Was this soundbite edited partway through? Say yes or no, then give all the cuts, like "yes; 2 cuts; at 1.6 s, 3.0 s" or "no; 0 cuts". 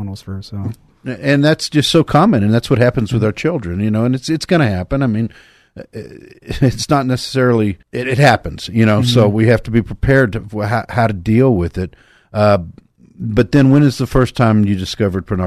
yes; 1 cut; at 7.8 s